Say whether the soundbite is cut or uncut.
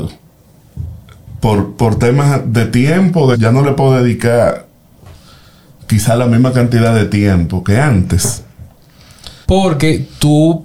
cut